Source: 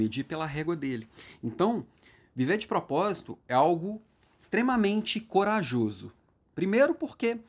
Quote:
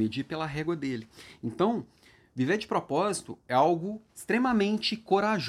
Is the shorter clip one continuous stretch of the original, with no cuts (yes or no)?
no